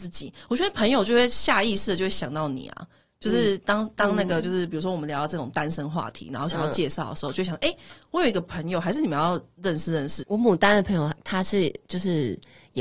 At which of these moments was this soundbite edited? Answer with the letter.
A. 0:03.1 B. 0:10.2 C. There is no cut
B